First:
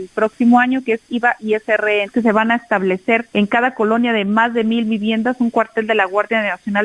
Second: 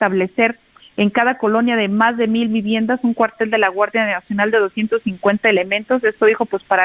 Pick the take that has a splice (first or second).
first